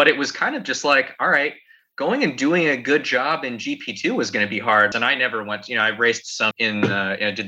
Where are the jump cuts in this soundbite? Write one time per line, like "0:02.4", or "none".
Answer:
0:04.9
0:06.5

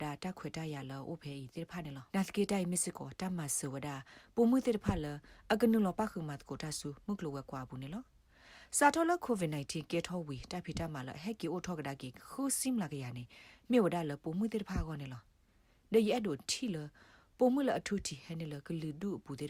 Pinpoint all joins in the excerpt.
0:02.1

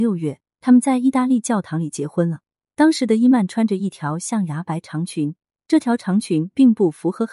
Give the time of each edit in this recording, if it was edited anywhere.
none

